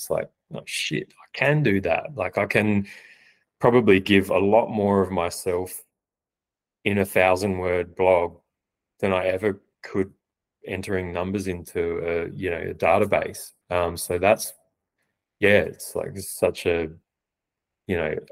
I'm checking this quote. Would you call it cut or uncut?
cut